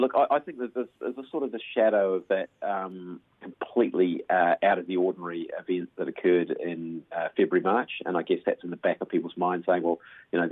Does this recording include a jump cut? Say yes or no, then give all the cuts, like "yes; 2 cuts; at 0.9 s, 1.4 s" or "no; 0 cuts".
no; 0 cuts